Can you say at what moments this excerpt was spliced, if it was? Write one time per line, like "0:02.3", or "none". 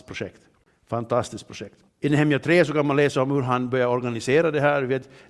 0:01.9